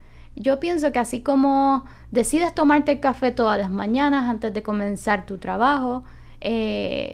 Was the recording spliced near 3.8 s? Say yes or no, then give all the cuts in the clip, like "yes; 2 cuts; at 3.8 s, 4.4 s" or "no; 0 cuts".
no; 0 cuts